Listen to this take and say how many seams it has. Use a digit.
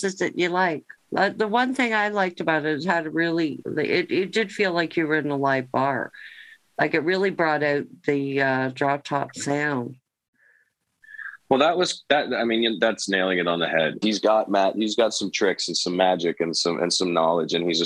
2